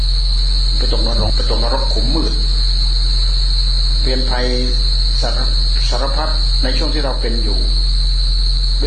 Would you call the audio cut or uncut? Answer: cut